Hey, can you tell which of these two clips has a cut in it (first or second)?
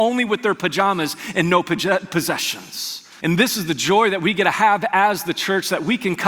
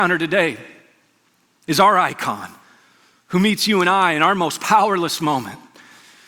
first